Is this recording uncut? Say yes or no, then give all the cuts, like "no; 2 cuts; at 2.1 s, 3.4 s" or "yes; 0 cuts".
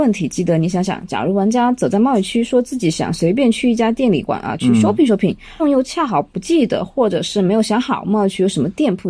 no; 2 cuts; at 4.3 s, 5.6 s